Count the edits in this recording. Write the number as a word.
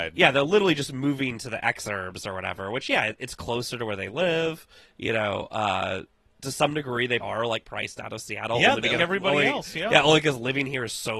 two